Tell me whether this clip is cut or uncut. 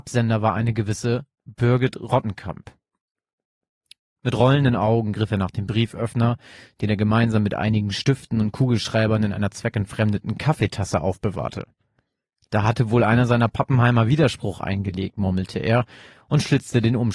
uncut